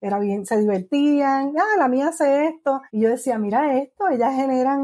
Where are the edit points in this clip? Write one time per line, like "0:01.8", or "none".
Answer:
0:02.9